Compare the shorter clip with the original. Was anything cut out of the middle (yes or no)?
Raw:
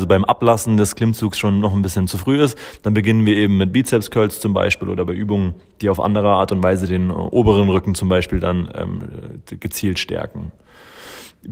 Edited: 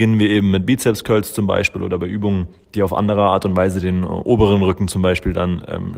no